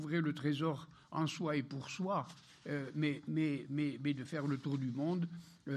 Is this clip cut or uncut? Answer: uncut